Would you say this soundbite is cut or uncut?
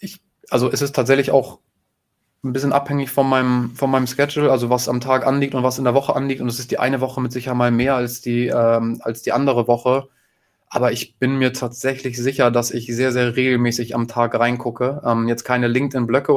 uncut